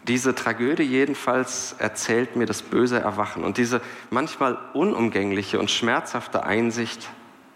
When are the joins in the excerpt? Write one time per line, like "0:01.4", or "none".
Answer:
none